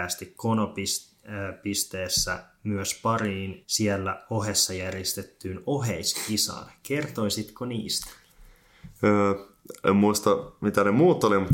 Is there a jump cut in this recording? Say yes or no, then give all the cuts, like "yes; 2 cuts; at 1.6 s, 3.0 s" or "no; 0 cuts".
no; 0 cuts